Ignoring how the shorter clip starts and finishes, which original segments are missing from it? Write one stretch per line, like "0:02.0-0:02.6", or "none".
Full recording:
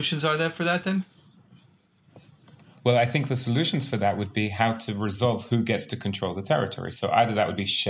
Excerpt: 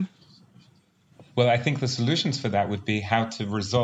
0:02.3-0:02.8

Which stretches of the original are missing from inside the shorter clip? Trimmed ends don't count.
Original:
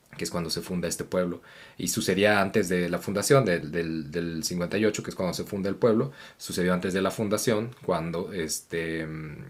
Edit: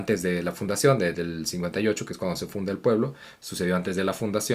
0:03.6-0:04.1

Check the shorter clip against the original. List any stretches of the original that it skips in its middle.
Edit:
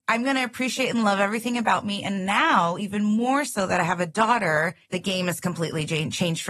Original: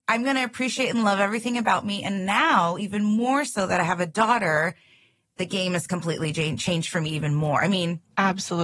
0:04.8-0:05.3

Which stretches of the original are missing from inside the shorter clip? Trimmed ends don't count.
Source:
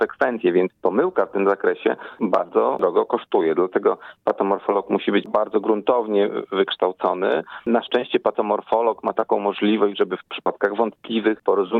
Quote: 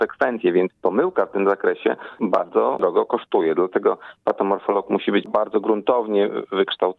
none

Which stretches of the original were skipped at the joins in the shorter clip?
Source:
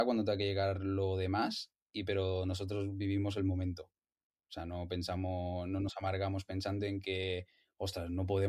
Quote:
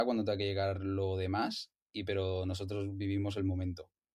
none

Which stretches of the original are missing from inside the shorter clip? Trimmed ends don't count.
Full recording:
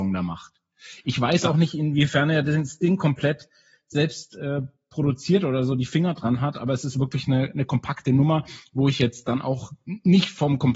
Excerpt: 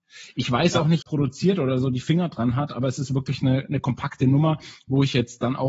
0:01.7-0:04.9

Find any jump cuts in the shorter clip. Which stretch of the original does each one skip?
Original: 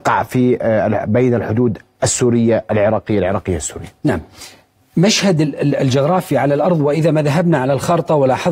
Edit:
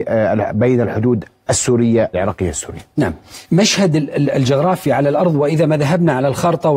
0:02.7-0:03.2
0:04.5-0:04.9

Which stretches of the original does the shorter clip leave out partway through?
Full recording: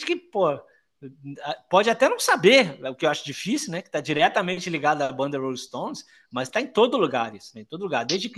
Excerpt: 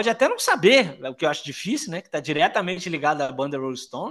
none

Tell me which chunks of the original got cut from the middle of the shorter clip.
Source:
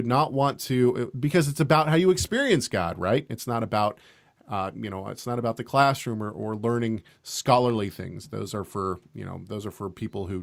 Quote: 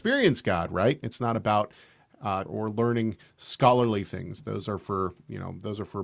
0:04.7-0:06.3

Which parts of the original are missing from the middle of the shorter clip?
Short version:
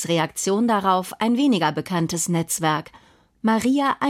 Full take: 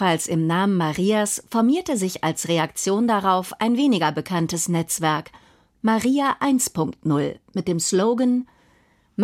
none

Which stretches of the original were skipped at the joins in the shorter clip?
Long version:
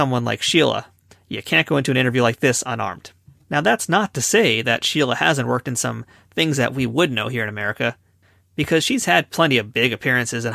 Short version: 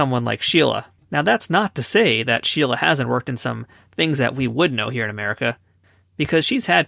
0:01.0-0:03.4

